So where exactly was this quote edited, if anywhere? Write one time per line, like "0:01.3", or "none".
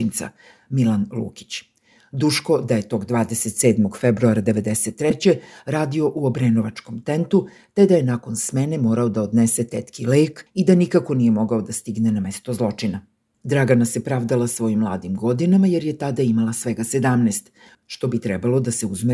0:17.7